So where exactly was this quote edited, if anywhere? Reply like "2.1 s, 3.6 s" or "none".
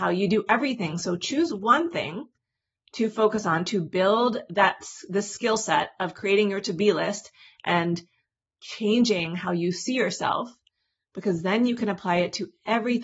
none